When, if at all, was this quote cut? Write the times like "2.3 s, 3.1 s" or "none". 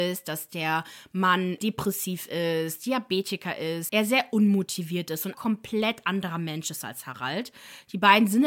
3.9 s, 5.3 s